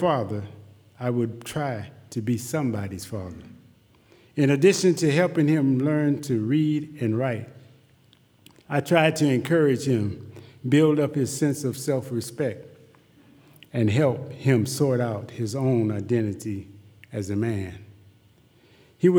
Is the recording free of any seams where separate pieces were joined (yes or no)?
yes